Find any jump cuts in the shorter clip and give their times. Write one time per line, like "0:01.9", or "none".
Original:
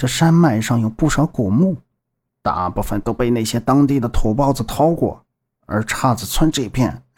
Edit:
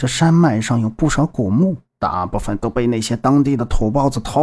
0:01.9